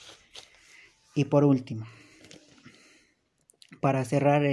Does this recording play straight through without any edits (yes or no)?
yes